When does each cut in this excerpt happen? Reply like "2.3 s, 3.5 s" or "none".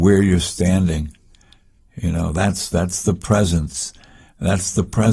none